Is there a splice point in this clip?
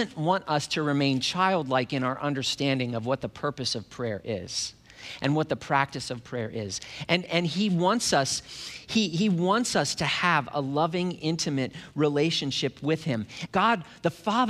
yes; 1 cut; at 13.5 s

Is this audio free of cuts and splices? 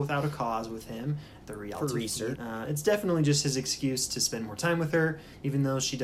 no; 1 cut; at 2.4 s

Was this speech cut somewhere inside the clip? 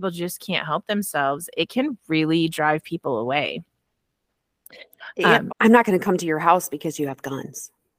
yes; 1 cut; at 5.5 s

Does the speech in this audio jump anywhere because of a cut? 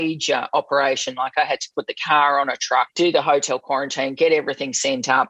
yes; 1 cut; at 2.9 s

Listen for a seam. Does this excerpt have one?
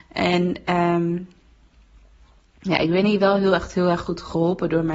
no; 0 cuts

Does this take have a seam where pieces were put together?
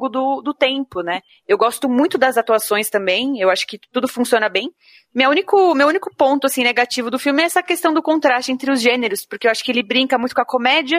yes; 1 cut; at 1.3 s

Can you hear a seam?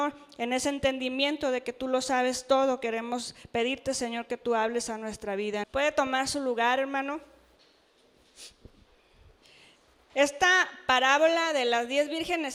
yes; 1 cut; at 5.6 s

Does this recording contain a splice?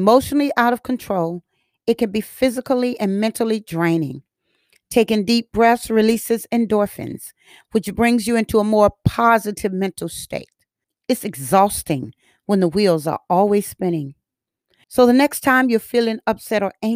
yes; 2 cuts; at 10.8 s, 14.8 s

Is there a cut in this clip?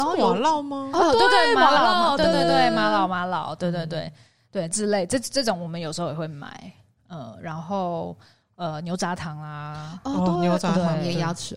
no; 0 cuts

